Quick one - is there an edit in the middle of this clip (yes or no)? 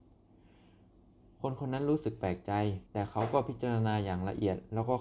yes